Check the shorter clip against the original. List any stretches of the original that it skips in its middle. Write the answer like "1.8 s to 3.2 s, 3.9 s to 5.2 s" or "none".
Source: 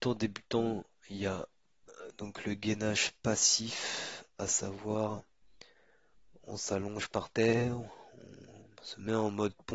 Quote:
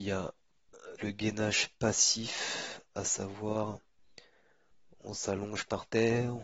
2.1 s to 2.4 s